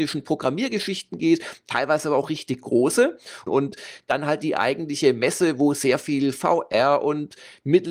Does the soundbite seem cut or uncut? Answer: cut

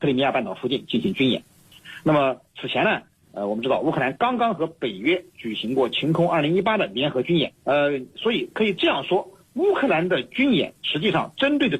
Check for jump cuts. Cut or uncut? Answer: cut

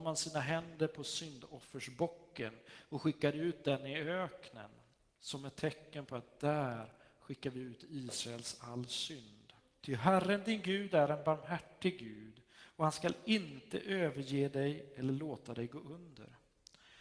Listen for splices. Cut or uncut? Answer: cut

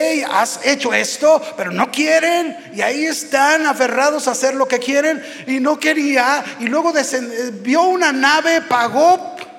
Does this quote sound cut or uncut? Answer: uncut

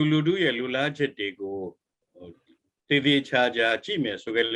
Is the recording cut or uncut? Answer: uncut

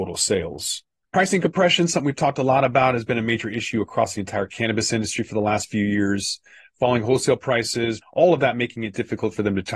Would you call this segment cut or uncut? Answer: cut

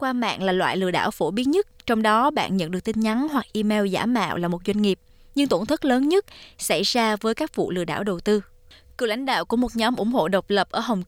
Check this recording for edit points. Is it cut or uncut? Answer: uncut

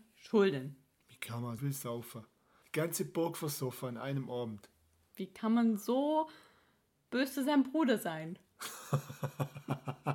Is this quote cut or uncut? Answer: cut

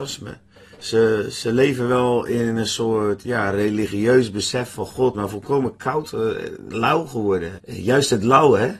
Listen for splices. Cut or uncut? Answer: cut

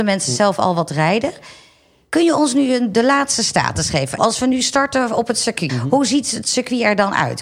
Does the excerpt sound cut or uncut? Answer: cut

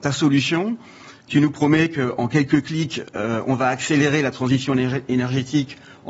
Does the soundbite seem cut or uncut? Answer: uncut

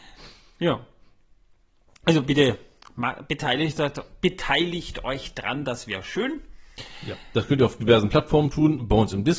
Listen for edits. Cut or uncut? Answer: uncut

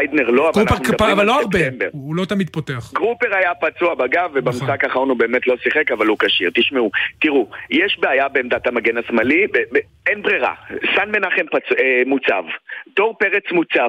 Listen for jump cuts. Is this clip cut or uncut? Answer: uncut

